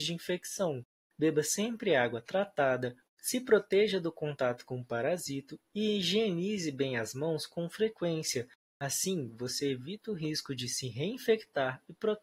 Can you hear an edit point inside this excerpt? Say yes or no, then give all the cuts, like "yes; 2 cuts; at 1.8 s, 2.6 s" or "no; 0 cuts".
yes; 1 cut; at 3.1 s